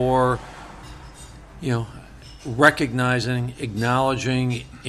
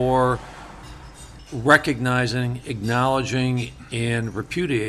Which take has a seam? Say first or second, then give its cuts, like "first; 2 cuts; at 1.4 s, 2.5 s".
second; 1 cut; at 1.4 s